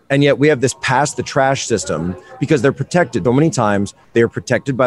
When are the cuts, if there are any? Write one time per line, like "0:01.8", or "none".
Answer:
0:03.2